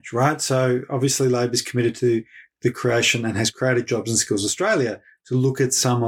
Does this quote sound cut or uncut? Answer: uncut